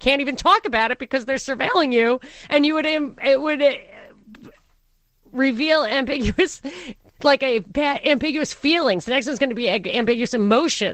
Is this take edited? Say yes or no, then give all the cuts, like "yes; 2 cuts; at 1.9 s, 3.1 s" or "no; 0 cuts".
no; 0 cuts